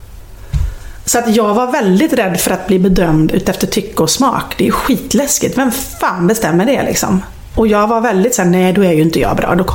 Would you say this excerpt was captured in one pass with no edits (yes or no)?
yes